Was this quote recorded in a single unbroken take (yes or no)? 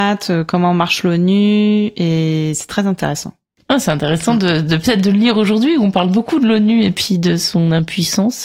yes